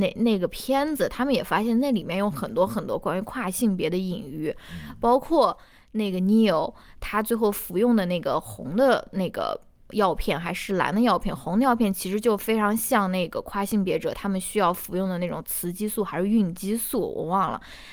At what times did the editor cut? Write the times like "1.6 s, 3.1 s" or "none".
none